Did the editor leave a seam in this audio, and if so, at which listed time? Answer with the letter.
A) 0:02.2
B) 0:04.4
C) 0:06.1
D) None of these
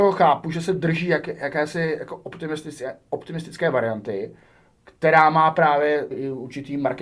C